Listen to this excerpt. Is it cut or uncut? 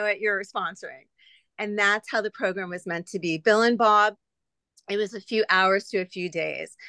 uncut